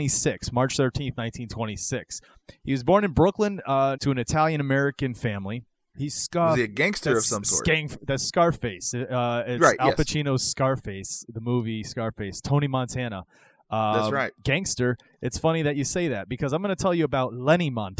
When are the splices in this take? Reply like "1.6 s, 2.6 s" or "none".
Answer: 4.0 s, 5.9 s